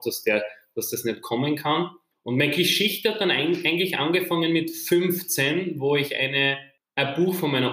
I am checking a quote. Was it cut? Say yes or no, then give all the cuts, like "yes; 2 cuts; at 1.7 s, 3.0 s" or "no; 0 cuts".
no; 0 cuts